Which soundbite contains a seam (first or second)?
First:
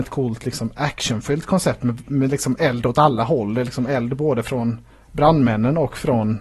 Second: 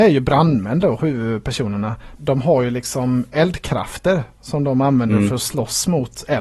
second